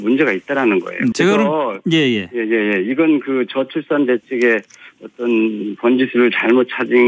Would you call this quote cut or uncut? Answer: cut